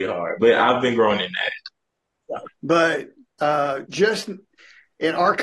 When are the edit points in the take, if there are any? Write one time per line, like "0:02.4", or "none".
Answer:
0:02.4
0:03.8